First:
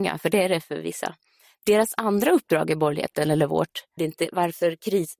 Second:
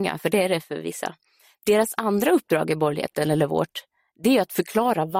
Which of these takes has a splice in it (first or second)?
first